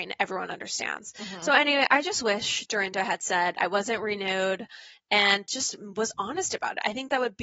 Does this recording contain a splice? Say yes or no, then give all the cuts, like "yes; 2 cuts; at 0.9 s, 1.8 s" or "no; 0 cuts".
no; 0 cuts